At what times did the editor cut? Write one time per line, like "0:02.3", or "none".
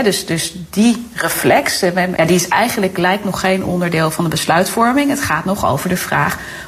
0:02.2